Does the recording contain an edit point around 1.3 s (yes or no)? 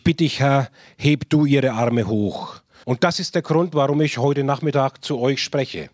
no